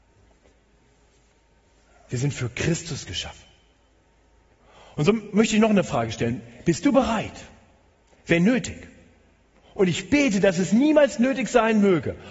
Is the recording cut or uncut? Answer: uncut